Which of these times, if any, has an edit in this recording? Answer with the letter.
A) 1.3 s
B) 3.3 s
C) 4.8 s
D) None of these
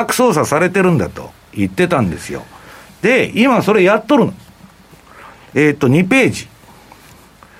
D